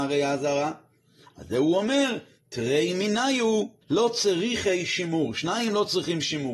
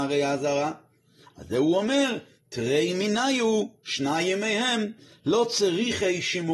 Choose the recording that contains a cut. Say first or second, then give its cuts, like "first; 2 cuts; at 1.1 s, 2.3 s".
first; 1 cut; at 3.8 s